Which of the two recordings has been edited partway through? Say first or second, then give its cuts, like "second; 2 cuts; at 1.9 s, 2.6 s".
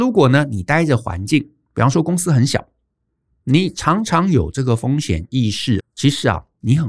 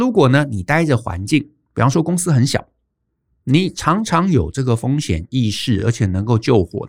first; 1 cut; at 5.8 s